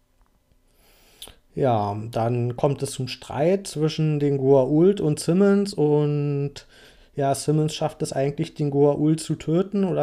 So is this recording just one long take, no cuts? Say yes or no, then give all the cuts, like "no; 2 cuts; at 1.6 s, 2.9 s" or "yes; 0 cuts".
yes; 0 cuts